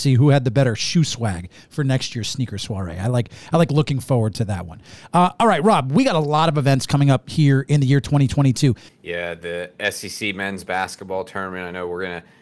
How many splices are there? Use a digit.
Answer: 1